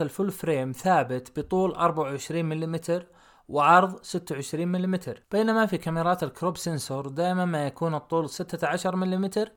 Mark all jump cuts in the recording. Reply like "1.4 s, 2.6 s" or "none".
none